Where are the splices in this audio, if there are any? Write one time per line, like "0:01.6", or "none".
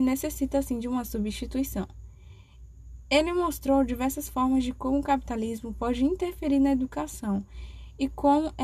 none